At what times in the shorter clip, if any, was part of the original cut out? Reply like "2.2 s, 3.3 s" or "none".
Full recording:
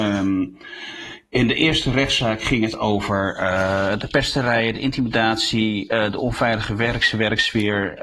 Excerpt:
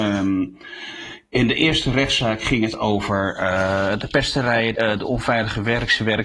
4.7 s